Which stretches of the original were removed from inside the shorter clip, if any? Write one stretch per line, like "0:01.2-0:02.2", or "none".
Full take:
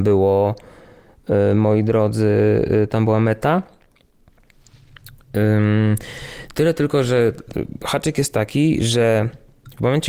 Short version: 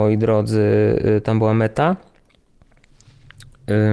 none